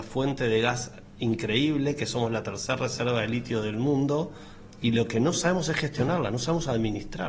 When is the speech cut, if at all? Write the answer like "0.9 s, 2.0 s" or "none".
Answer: none